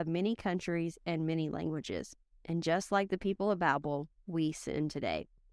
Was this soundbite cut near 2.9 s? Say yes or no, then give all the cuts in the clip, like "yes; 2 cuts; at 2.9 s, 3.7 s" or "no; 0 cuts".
no; 0 cuts